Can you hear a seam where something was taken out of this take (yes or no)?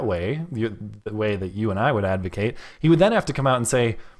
no